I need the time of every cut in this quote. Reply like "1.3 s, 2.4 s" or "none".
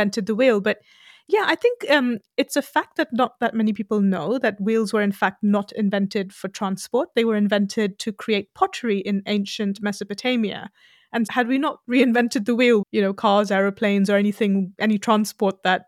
11.3 s, 12.8 s